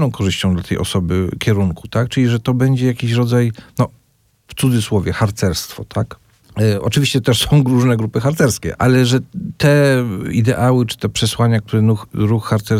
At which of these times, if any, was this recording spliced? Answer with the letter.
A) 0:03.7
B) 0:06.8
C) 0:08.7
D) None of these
C